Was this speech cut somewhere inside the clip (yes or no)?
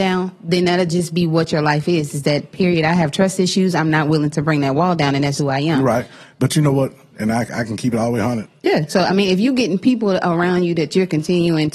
yes